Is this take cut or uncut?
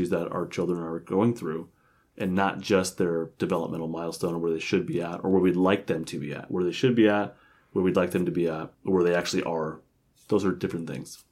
cut